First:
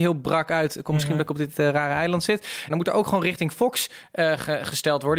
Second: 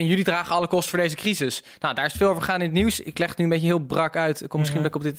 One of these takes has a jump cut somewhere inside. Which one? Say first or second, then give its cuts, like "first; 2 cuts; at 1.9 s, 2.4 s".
first; 1 cut; at 2.7 s